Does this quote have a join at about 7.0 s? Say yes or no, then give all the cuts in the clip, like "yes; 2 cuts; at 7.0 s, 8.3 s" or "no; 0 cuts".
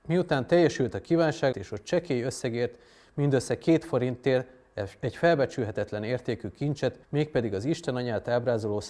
yes; 2 cuts; at 1.5 s, 7.0 s